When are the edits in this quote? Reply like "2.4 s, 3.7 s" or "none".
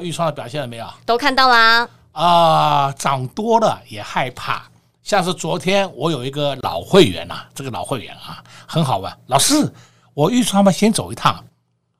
none